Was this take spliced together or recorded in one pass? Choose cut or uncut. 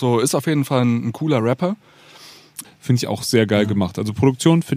cut